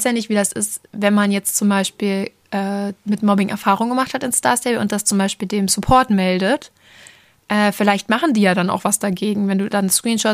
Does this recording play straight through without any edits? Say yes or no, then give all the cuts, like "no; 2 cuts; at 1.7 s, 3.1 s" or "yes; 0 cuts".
yes; 0 cuts